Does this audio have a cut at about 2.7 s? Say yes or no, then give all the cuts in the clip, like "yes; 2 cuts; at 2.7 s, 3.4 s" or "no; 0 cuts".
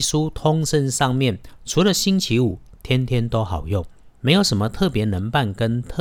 no; 0 cuts